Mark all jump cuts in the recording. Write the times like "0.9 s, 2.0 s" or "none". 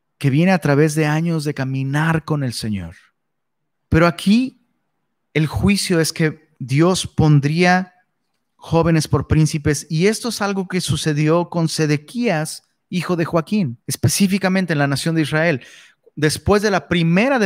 3.7 s, 6.6 s, 13.8 s